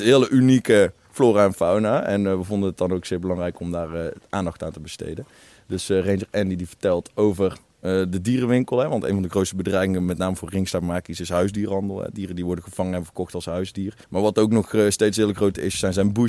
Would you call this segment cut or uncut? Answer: cut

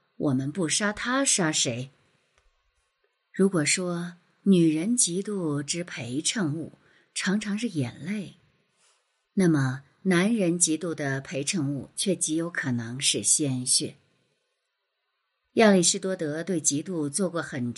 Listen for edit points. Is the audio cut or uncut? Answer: uncut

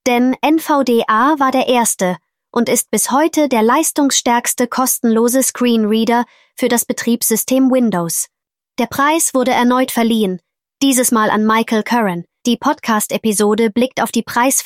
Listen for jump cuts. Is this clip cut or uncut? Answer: cut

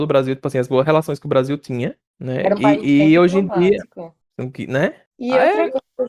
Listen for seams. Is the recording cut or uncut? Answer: cut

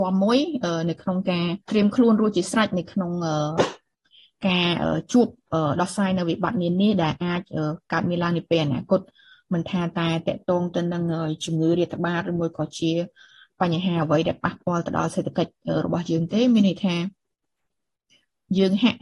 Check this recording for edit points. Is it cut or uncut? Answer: cut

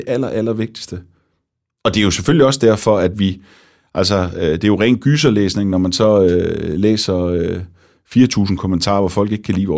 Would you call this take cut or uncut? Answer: uncut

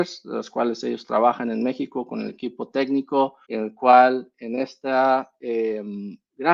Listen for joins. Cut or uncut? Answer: cut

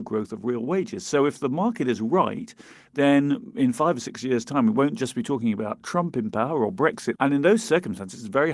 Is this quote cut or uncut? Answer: cut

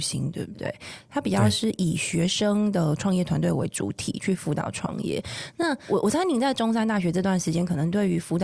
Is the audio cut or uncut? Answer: uncut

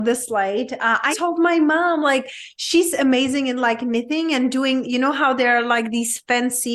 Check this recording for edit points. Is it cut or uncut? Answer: cut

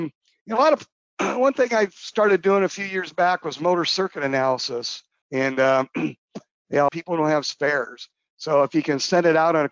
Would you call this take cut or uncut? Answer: cut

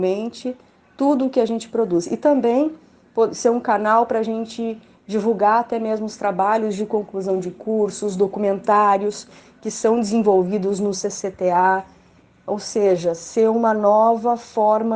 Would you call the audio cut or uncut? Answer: uncut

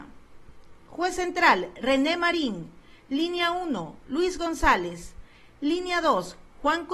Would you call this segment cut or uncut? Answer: uncut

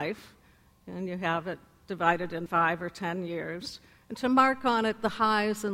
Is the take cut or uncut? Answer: cut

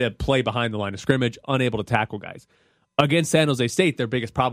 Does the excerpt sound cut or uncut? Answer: uncut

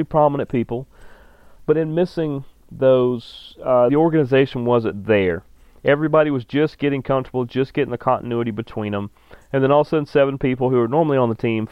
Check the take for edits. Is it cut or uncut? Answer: cut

